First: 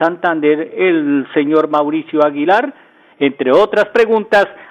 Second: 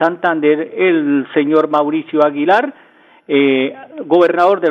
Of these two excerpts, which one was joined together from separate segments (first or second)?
first